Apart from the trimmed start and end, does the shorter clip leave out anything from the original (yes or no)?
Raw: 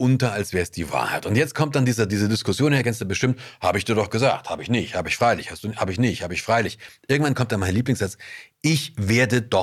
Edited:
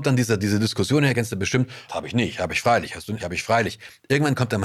yes